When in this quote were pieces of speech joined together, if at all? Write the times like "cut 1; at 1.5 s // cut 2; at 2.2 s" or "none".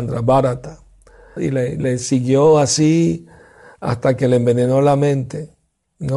cut 1; at 1.4 s